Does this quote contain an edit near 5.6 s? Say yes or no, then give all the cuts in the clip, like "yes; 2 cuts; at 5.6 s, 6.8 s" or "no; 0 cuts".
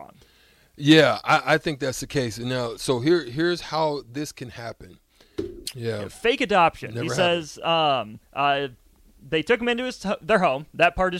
yes; 2 cuts; at 5.6 s, 8.2 s